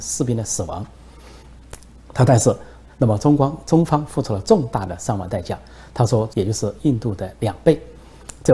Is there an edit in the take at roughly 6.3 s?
yes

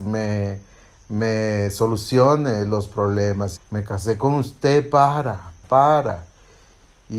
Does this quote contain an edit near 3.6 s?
yes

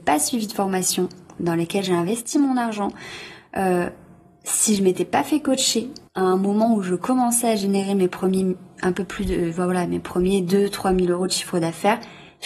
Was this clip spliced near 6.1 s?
yes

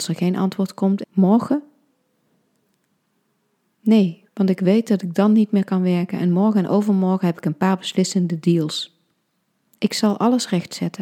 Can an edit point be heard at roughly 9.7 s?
yes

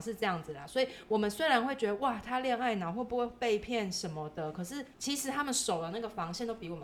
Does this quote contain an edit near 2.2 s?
no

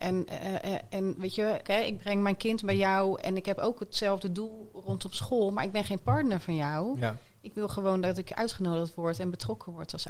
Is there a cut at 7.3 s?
no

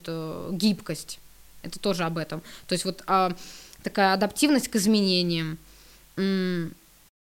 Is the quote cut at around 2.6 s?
no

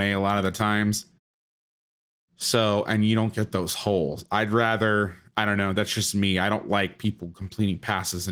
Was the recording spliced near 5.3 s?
no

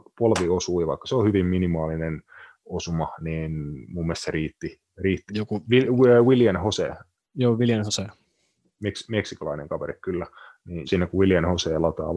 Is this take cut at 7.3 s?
no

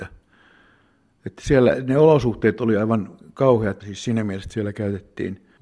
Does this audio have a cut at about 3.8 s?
yes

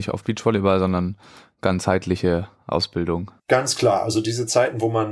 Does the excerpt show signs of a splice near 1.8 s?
no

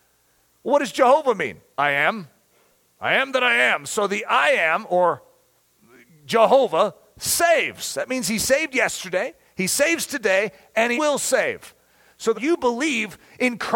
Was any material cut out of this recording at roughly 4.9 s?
no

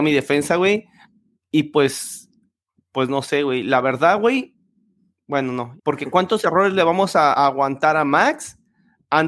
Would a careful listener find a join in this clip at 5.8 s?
yes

